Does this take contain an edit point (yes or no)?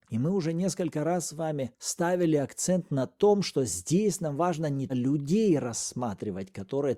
yes